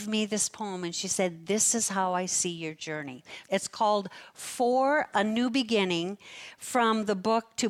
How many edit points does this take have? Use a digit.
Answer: 1